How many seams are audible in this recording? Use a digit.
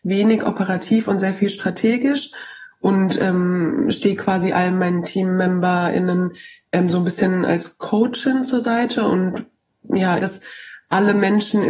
1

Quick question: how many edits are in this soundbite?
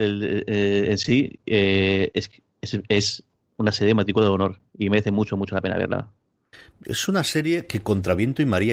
0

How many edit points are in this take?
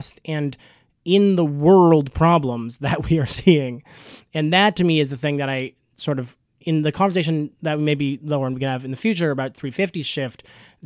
0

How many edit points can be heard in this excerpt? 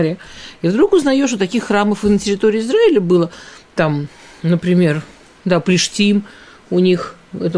0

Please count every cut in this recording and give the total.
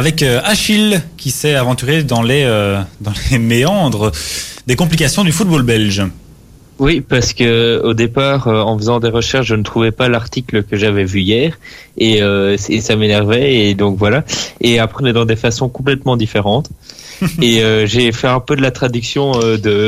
1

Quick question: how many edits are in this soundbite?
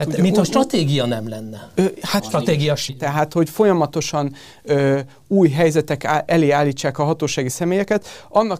1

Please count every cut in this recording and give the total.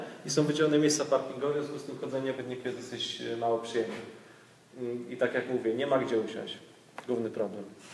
1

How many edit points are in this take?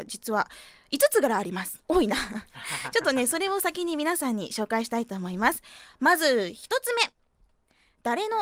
0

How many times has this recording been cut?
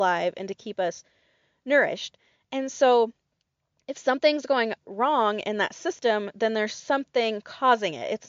0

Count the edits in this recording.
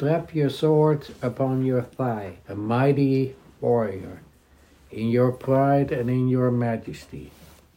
1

